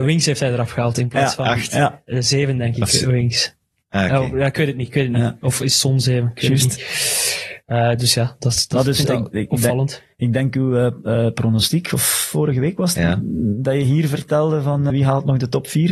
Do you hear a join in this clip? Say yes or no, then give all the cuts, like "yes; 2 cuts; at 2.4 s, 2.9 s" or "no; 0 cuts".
yes; 2 cuts; at 12.9 s, 14.9 s